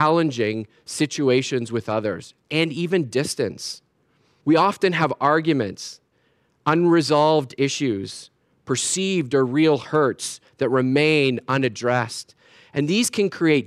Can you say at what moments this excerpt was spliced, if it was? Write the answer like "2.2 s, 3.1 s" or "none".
4.4 s